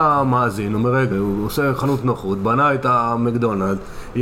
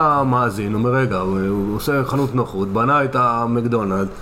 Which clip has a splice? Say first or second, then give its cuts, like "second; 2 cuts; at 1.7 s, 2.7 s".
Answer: first; 1 cut; at 1.1 s